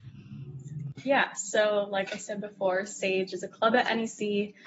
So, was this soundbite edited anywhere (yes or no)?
no